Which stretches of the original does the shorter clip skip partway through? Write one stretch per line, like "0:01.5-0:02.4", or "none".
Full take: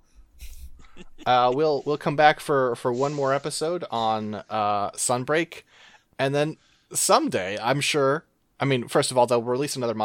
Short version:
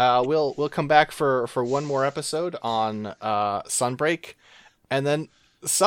none

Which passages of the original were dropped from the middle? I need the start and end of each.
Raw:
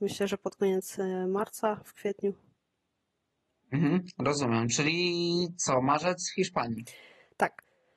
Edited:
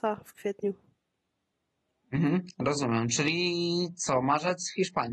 none

